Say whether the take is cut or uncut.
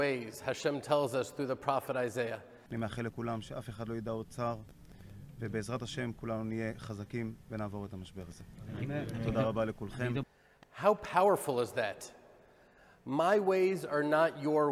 cut